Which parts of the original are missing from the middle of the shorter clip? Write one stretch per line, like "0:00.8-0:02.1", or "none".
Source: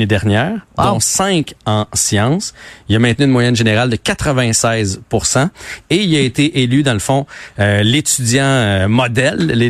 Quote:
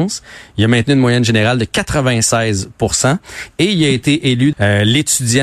0:06.8-0:07.5